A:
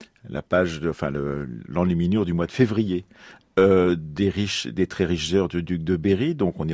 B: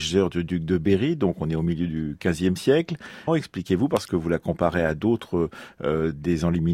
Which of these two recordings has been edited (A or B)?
B